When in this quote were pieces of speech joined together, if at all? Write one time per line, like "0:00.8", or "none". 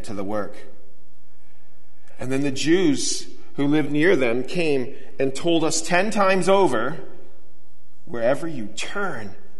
none